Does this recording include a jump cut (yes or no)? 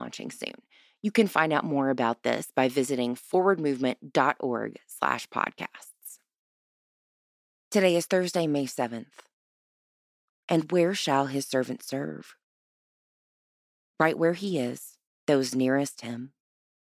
yes